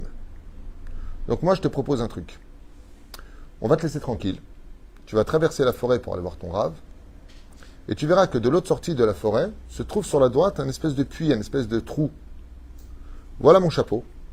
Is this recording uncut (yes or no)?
yes